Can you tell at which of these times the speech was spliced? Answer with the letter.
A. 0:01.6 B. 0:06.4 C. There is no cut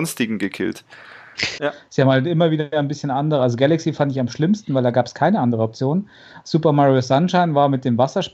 A